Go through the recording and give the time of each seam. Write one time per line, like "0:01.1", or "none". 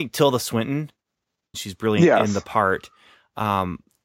0:01.5